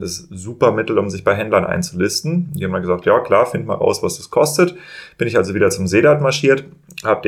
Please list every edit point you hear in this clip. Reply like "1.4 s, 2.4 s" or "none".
none